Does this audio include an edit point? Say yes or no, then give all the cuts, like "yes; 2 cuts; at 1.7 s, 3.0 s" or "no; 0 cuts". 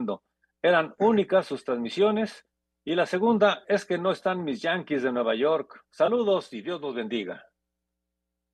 no; 0 cuts